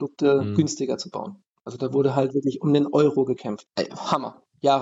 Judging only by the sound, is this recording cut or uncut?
cut